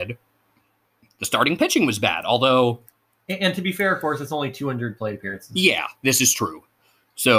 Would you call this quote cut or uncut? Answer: cut